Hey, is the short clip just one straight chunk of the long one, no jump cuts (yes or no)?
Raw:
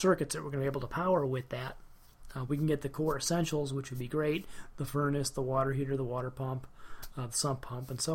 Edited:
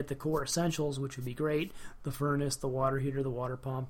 yes